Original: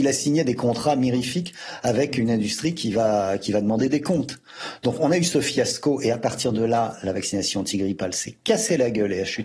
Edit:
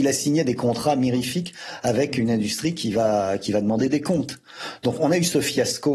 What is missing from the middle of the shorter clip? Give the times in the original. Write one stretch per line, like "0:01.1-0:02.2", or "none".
none